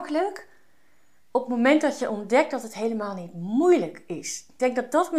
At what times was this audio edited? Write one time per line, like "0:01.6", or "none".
none